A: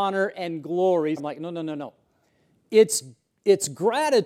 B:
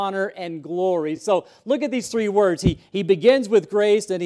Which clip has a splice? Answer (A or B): A